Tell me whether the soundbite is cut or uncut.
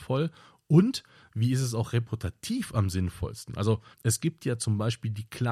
cut